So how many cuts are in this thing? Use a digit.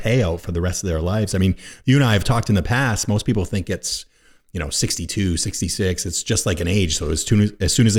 0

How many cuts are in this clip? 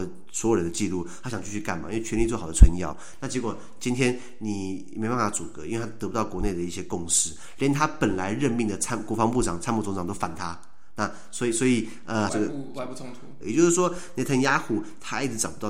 2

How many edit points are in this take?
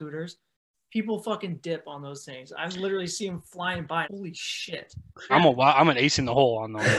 2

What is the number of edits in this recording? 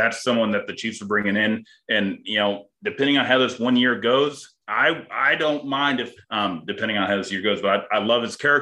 2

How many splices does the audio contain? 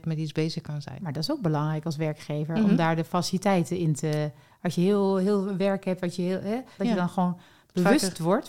1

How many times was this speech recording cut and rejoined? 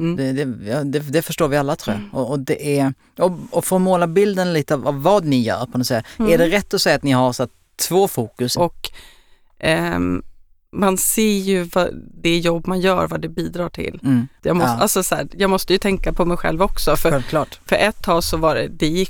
2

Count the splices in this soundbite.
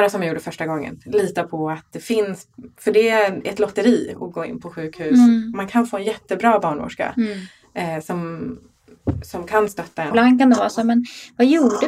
1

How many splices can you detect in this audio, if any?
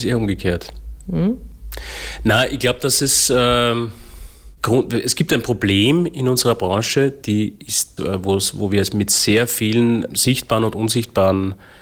1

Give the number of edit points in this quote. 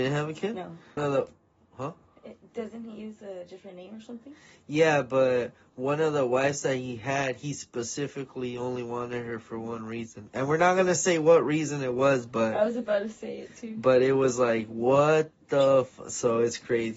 1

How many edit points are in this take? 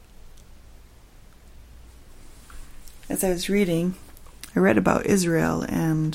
0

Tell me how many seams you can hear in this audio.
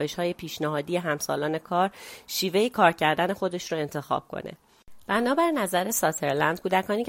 0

